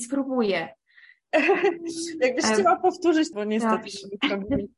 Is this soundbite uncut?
no; 2 cuts; at 1.3 s, 3.3 s

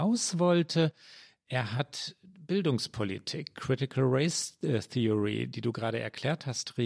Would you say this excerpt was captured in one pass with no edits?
yes; 0 cuts

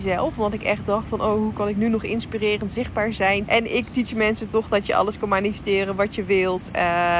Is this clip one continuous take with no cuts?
no; 1 cut; at 3.5 s

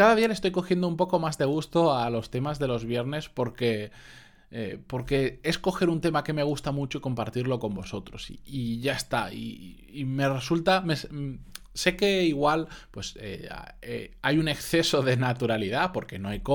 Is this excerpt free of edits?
yes; 0 cuts

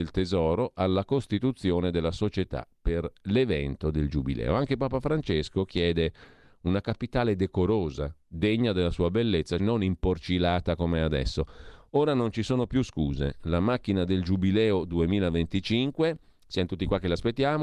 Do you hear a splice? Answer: yes; 1 cut; at 9.6 s

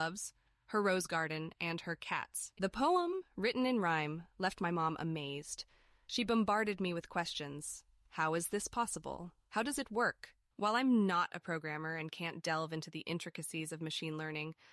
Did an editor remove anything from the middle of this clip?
yes; 2 cuts; at 2.6 s, 10.5 s

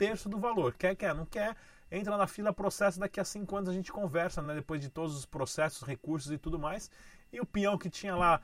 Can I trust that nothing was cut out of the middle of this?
yes; 0 cuts

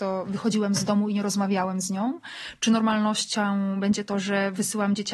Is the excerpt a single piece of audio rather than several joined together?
yes; 0 cuts

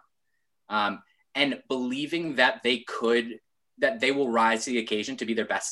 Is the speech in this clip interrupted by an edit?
no; 0 cuts

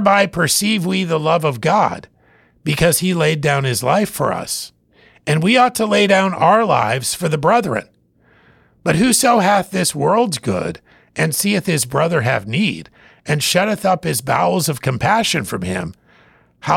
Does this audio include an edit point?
no; 0 cuts

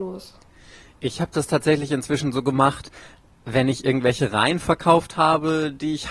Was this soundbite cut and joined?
no; 0 cuts

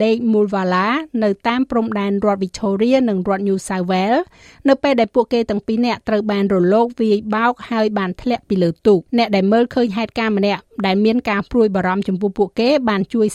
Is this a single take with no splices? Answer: no; 1 cut; at 9.1 s

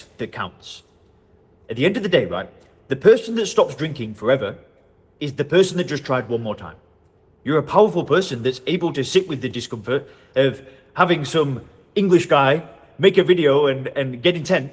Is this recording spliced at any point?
yes; 1 cut; at 7.3 s

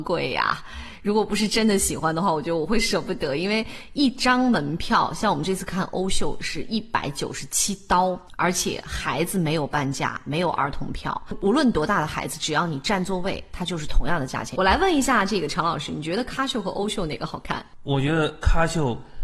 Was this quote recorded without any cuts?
no; 1 cut; at 14.6 s

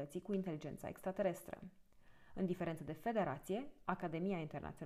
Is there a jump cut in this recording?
no; 0 cuts

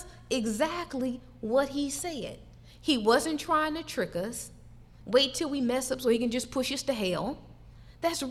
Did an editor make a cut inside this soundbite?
yes; 1 cut; at 5.0 s

